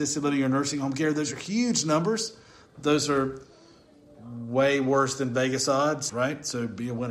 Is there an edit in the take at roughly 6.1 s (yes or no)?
yes